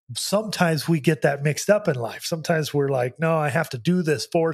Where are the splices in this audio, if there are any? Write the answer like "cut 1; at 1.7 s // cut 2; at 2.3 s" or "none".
none